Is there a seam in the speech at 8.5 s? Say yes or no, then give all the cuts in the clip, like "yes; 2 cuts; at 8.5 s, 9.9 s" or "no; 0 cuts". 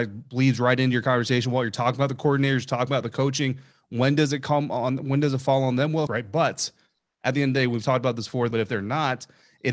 yes; 2 cuts; at 6.1 s, 8.5 s